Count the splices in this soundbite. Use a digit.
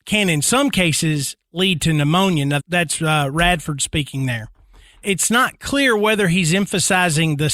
2